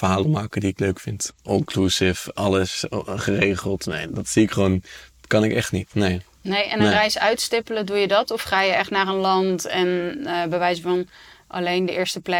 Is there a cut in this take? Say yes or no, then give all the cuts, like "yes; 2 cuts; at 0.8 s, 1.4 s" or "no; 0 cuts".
yes; 2 cuts; at 1.5 s, 4.1 s